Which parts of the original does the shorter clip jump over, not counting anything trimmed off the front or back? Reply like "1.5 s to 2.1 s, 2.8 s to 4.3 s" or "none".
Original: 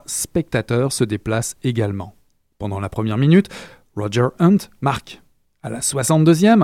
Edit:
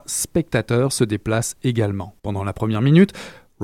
2.2 s to 2.6 s